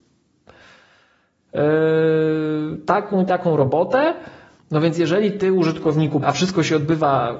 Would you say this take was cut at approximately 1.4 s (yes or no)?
no